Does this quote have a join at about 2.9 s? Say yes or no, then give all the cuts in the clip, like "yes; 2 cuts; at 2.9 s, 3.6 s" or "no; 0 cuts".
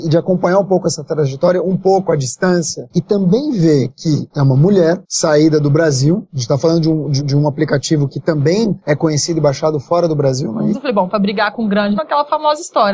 no; 3 cuts; at 7.2 s, 10.7 s, 12.0 s